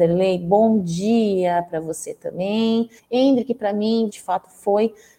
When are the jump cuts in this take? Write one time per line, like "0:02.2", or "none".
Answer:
0:03.0
0:04.1